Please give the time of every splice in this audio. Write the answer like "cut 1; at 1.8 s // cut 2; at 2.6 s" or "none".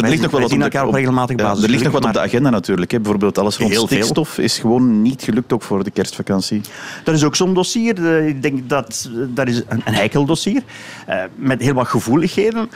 none